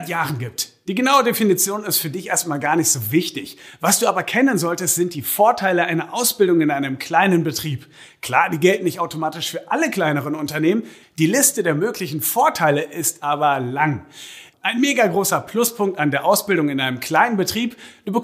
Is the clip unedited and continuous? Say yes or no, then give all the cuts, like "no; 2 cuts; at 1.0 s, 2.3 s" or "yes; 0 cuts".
no; 2 cuts; at 11.0 s, 14.5 s